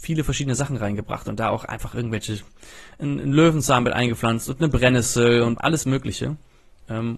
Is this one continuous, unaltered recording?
no; 1 cut; at 5.6 s

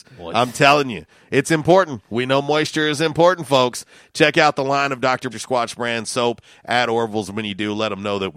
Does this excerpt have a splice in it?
yes; 1 cut; at 5.3 s

